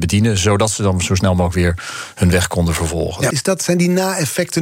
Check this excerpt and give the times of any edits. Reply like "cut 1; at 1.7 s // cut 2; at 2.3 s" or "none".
cut 1; at 3.3 s